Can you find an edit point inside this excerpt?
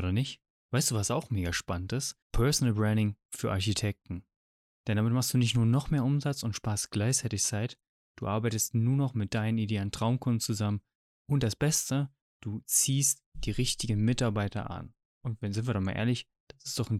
yes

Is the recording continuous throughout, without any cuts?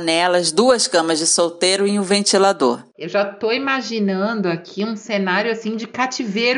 yes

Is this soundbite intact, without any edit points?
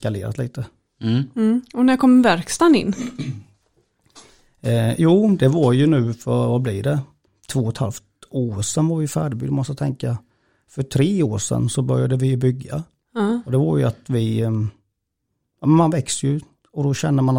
yes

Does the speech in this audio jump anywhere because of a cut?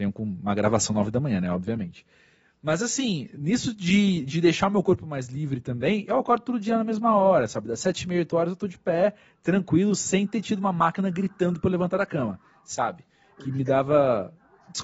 no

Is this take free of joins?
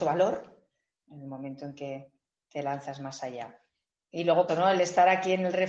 no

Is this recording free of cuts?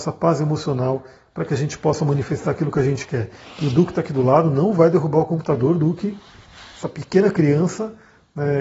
yes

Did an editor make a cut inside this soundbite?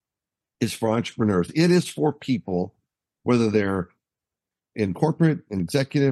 no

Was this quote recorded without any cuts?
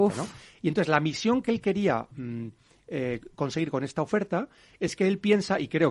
yes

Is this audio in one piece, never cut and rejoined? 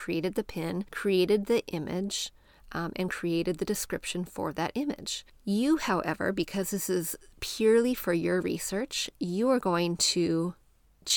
yes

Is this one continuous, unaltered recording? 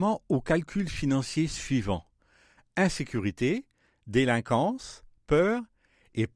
yes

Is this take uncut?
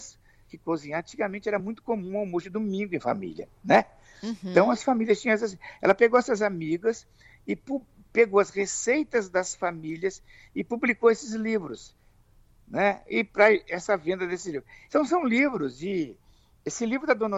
yes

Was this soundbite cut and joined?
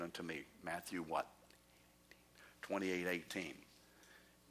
no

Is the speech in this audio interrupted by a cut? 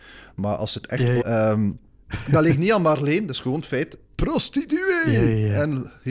yes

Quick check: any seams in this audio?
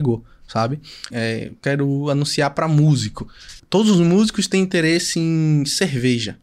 yes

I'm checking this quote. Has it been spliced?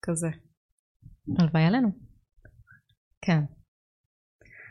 no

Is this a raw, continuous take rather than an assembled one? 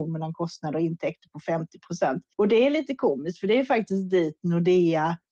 no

